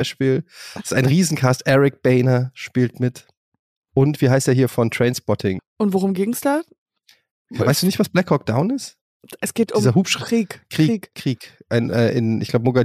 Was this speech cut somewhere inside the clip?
yes; 1 cut; at 5.6 s

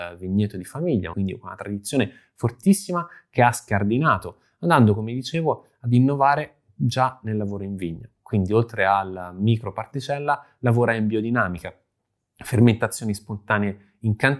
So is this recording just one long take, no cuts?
no; 1 cut; at 1.1 s

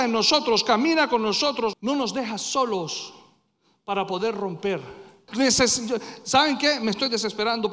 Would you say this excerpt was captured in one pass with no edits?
no; 2 cuts; at 1.7 s, 5.3 s

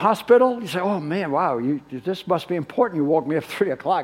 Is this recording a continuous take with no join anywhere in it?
yes; 0 cuts

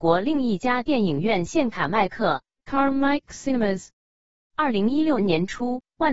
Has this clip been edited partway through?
yes; 1 cut; at 5.2 s

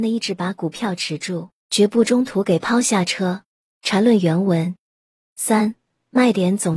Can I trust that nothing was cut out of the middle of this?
no; 1 cut; at 3.6 s

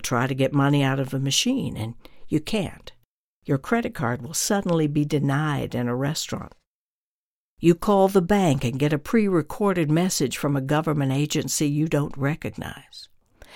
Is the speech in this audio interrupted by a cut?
no; 0 cuts

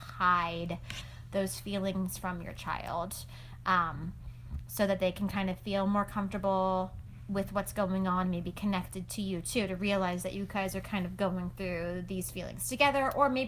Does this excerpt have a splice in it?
no; 0 cuts

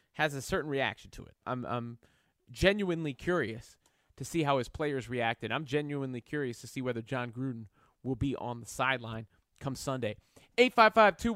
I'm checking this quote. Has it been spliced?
yes; 1 cut; at 1.4 s

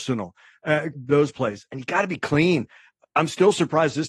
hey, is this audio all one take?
no; 1 cut; at 0.9 s

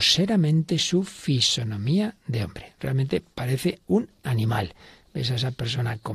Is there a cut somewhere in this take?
no; 0 cuts

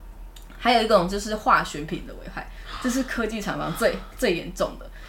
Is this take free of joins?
yes; 0 cuts

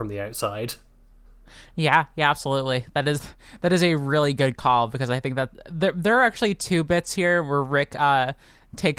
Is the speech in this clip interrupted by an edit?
no; 0 cuts

